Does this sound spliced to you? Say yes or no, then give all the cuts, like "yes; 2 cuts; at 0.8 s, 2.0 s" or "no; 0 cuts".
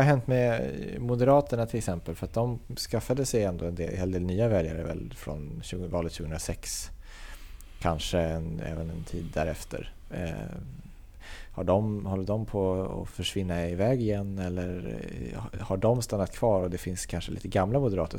no; 0 cuts